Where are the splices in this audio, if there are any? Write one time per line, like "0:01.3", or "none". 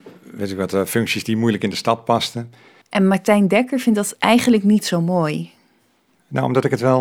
0:02.8